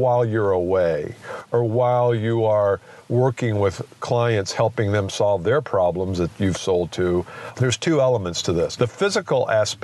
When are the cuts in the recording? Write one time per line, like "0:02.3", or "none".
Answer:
0:07.5
0:08.8